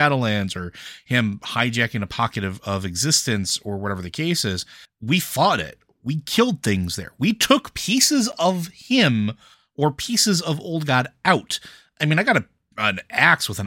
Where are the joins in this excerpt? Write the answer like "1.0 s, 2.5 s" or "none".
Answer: none